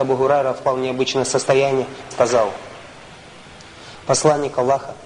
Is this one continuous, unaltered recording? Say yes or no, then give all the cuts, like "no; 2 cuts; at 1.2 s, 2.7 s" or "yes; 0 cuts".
no; 1 cut; at 2.1 s